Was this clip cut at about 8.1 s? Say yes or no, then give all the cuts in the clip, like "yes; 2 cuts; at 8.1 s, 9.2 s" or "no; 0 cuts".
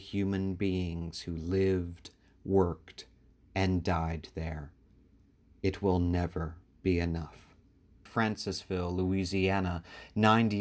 yes; 1 cut; at 8.1 s